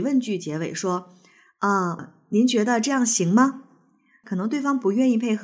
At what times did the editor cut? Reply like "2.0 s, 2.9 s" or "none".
2.0 s, 4.2 s